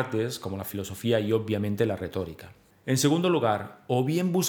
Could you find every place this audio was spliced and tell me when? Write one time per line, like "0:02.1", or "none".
0:02.7